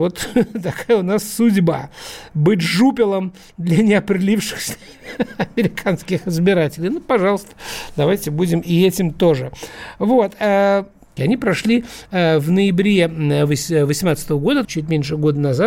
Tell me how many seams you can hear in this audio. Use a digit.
2